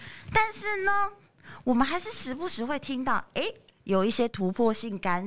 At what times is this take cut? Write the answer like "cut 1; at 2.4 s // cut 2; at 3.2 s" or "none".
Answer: none